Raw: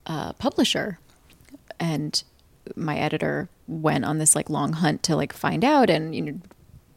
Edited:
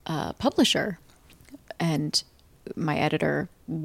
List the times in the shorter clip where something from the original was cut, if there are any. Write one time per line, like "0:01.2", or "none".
none